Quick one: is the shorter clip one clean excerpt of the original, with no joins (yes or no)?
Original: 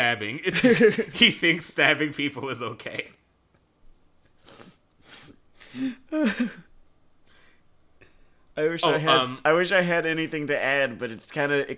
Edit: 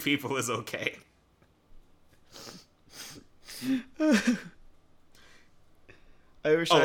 yes